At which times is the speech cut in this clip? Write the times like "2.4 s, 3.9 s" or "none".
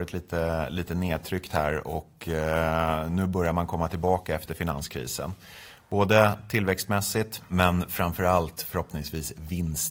none